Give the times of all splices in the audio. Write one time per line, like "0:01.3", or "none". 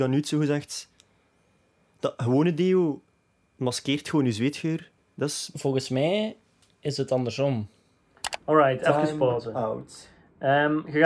0:05.0